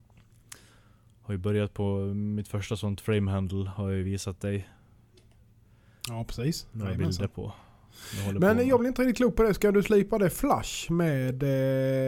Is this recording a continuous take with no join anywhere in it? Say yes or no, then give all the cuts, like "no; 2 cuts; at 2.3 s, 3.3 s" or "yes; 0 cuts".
yes; 0 cuts